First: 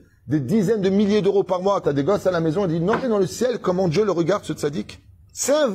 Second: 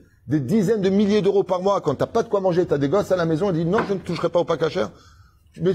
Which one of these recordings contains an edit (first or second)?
first